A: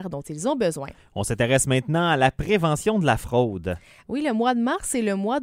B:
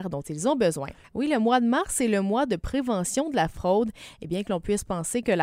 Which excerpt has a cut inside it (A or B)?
B